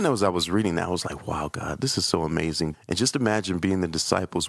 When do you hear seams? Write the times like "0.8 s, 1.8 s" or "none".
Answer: 2.7 s

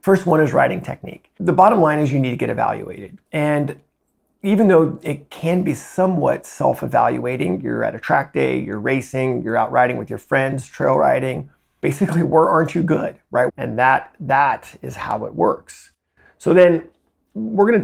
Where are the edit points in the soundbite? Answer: 3.3 s, 13.5 s

